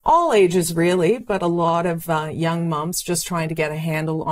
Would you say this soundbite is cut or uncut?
uncut